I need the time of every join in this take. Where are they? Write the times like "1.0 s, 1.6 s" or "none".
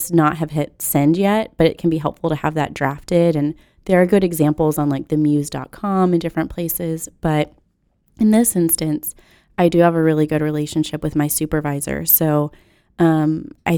none